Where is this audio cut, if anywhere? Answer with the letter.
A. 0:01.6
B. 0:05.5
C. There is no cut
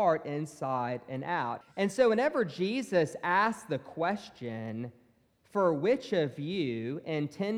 A